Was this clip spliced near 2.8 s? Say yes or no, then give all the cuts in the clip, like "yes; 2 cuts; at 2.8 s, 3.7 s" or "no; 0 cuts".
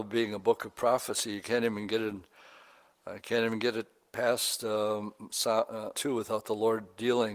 no; 1 cut; at 5.9 s